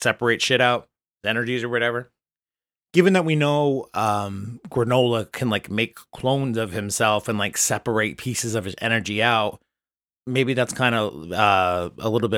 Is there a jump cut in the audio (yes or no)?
no